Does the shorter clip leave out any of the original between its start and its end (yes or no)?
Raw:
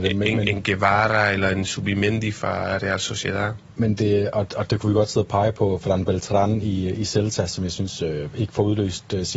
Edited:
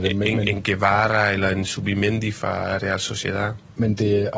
no